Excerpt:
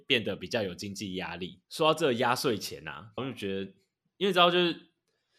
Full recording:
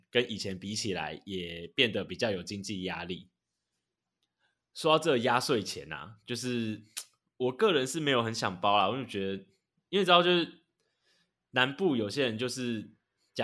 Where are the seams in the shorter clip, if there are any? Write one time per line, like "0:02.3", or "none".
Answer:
0:01.6
0:03.2

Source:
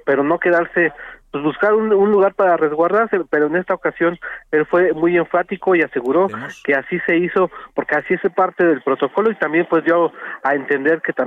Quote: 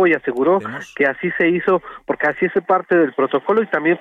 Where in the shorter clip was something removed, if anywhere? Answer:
none

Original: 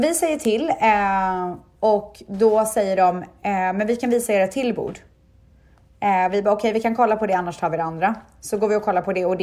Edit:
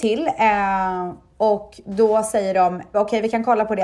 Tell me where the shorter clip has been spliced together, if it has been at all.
0:02.9

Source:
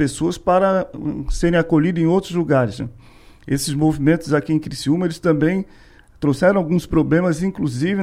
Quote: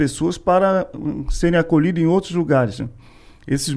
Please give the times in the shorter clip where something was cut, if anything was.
none

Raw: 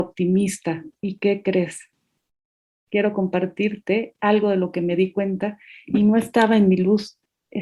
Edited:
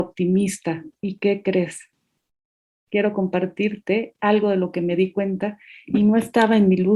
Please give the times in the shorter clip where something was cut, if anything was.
none

